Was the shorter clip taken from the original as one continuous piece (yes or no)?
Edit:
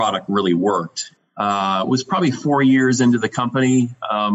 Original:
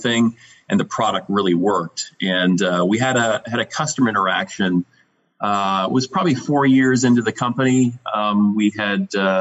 no